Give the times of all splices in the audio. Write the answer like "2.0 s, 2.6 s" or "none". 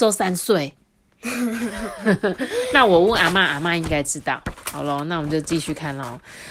none